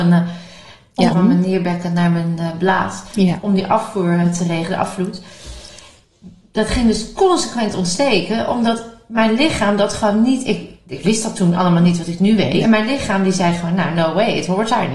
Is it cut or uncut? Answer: cut